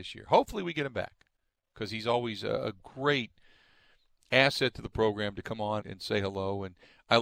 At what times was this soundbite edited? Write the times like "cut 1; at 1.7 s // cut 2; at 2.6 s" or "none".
cut 1; at 5.8 s